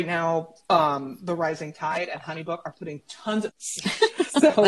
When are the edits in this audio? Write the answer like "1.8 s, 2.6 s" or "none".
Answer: 3.5 s

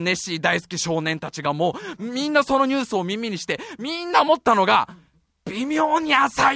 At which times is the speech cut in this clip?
none

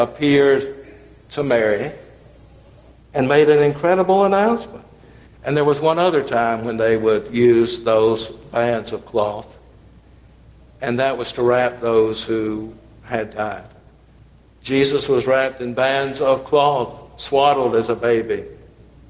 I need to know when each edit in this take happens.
5.3 s

